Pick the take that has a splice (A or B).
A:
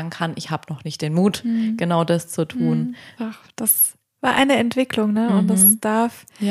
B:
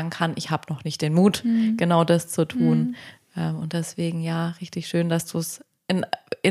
A